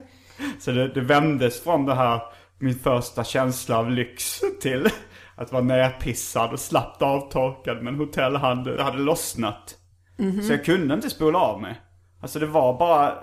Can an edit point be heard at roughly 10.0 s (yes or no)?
no